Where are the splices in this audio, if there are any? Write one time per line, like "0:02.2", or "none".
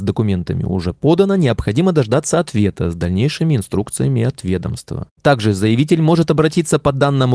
none